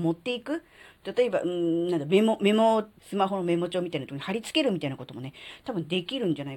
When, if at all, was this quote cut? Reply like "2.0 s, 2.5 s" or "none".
3.0 s